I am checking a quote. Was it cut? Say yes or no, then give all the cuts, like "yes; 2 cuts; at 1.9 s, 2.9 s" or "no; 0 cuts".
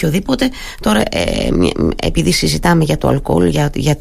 no; 0 cuts